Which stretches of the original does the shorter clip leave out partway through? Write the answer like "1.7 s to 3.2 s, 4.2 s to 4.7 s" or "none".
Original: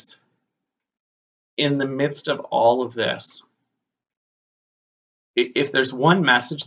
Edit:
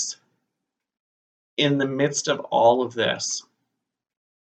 none

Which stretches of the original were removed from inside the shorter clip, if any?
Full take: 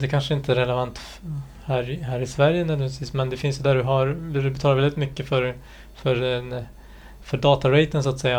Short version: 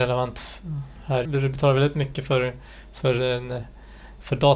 1.8 s to 4.3 s

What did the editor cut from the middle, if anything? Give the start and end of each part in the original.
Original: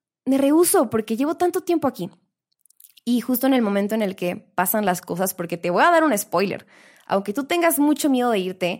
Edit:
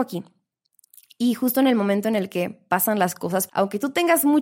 5.4 s to 7.0 s

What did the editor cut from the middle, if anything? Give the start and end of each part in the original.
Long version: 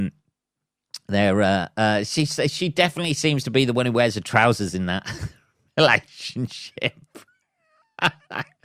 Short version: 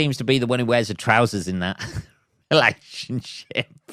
none

